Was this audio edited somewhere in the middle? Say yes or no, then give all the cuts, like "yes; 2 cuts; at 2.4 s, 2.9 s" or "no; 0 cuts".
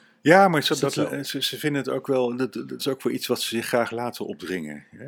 yes; 1 cut; at 2.8 s